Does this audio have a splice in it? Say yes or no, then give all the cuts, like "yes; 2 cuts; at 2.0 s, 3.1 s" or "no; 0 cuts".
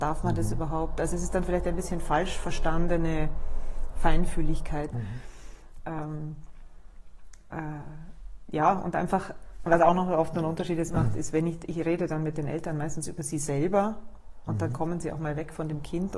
yes; 2 cuts; at 4.9 s, 9.7 s